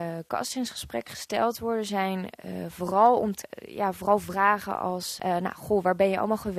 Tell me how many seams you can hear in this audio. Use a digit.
0